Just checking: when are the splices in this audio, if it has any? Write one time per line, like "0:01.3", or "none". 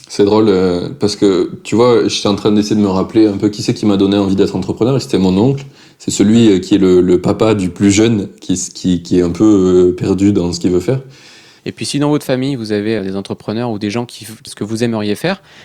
0:11.6
0:13.0
0:14.5